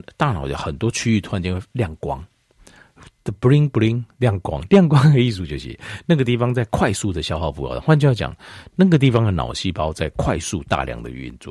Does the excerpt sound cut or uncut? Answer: uncut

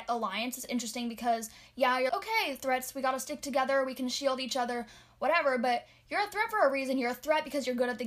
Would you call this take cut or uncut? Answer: cut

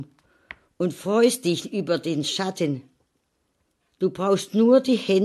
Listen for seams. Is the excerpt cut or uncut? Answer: uncut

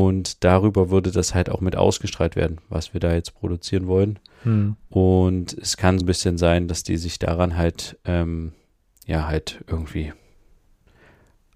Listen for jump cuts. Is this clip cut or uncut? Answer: cut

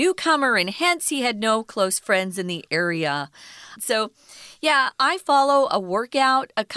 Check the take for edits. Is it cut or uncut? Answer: cut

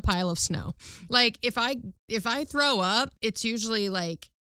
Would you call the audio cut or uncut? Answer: cut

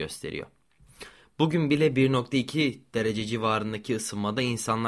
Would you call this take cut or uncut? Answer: uncut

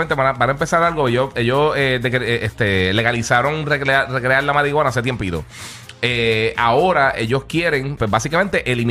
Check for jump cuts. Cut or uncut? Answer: cut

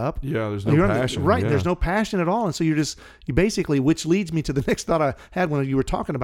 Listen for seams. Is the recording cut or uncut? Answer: uncut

